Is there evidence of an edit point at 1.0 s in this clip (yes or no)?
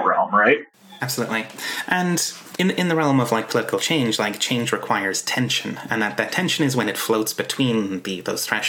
yes